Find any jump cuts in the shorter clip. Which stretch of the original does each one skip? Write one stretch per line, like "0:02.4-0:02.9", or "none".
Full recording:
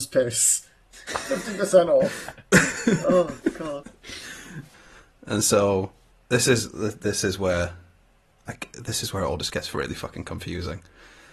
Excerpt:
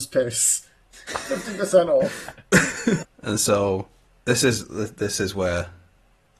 0:03.0-0:05.1